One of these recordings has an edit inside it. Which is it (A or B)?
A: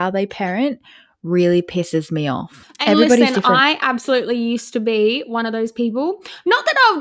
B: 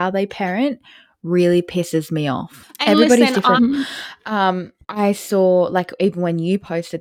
B